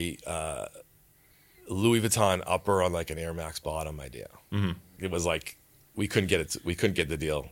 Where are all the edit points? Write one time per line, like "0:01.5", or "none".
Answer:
0:05.0